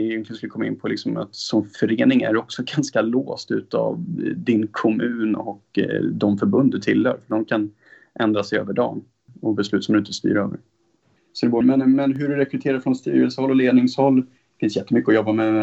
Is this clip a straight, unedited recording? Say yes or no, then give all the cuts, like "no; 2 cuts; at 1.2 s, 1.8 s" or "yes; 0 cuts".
yes; 0 cuts